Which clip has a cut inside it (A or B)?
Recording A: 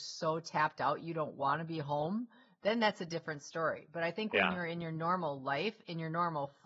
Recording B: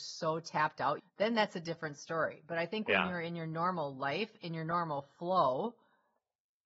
B